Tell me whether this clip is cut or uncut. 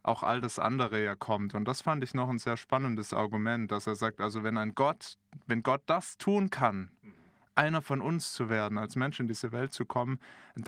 uncut